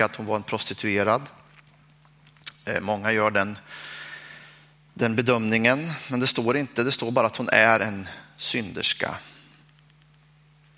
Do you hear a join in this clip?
no; 0 cuts

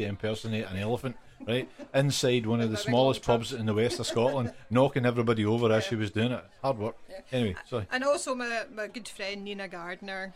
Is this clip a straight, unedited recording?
yes; 0 cuts

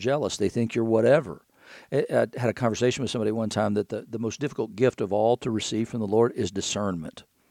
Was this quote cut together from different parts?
no; 0 cuts

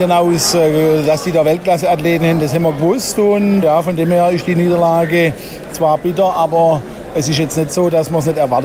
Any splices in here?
yes; 1 cut; at 3.6 s

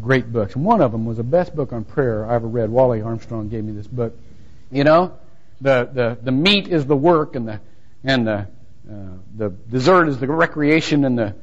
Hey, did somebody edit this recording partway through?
yes; 1 cut; at 4.7 s

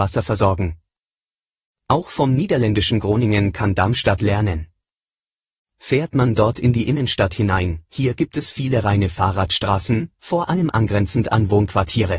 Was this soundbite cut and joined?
yes; 1 cut; at 7.9 s

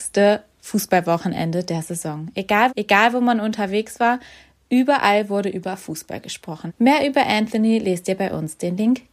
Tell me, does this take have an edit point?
yes; 2 cuts; at 2.7 s, 6.7 s

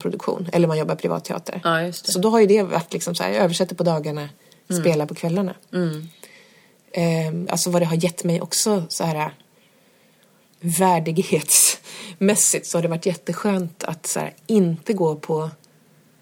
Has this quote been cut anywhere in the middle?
yes; 1 cut; at 7.5 s

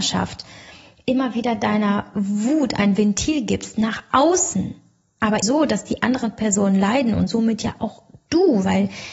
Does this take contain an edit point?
yes; 1 cut; at 5.4 s

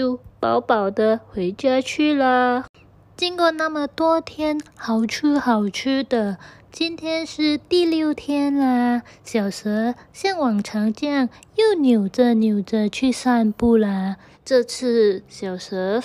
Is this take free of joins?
no; 1 cut; at 14.3 s

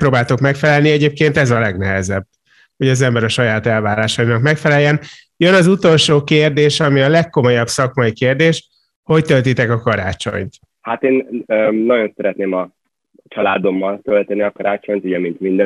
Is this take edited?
no; 0 cuts

